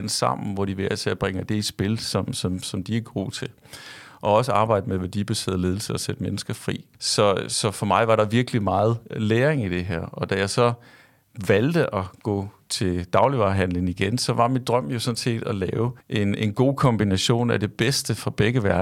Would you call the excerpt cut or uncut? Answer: cut